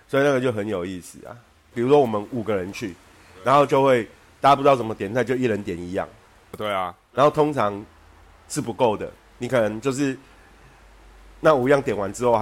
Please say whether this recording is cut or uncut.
cut